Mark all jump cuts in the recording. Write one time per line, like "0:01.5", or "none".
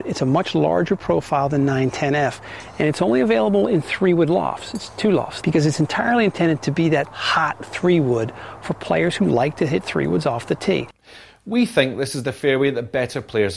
0:05.4
0:07.0